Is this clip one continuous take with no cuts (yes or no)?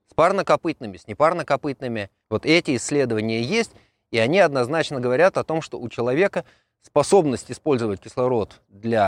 no